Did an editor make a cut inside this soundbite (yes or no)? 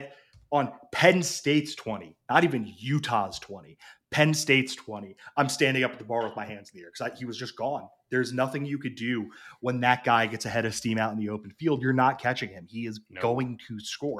no